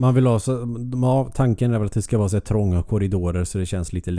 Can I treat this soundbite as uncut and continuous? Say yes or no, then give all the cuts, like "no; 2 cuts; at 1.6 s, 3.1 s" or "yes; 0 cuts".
yes; 0 cuts